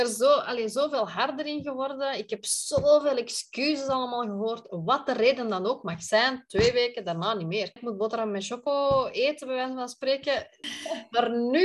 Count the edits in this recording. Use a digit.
2